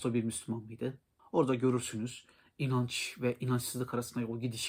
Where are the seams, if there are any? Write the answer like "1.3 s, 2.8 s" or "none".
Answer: 1.2 s